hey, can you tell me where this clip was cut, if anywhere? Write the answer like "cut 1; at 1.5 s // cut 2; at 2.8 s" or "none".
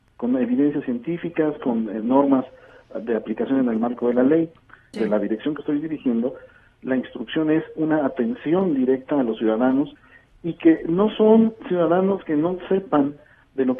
cut 1; at 4.9 s